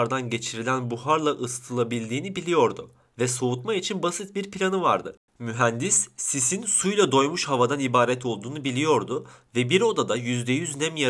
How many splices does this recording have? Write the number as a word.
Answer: one